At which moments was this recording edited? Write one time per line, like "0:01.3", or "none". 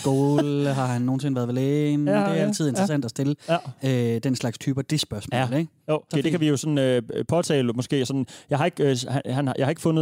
0:06.1

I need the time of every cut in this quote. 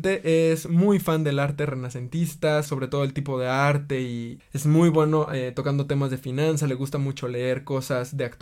0:02.7
0:04.4

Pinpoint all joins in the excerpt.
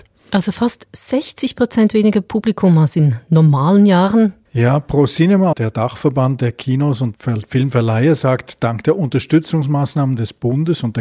0:04.5
0:05.5
0:07.1

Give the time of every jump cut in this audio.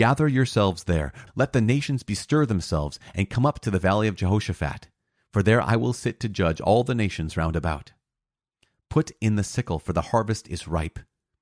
0:01.3

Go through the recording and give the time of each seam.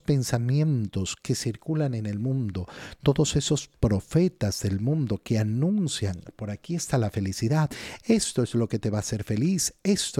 none

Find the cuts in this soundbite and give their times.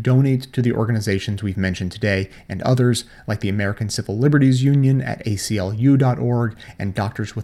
none

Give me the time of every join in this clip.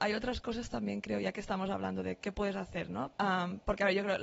0:03.1

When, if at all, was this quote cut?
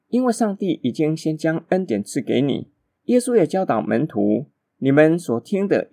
0:03.0

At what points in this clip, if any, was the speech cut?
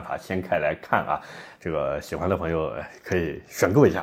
0:01.6

